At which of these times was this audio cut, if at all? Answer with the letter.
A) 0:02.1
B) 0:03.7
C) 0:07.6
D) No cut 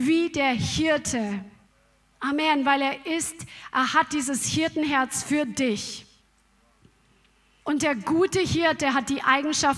C